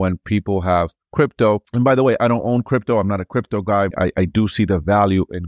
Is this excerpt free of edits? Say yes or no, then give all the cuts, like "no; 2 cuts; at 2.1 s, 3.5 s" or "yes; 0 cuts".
no; 1 cut; at 3.9 s